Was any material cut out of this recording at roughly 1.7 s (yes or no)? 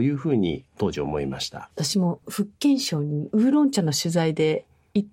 yes